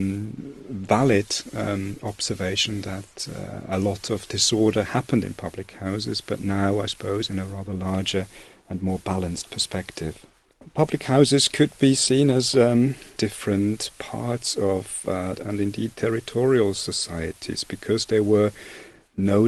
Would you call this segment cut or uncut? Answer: cut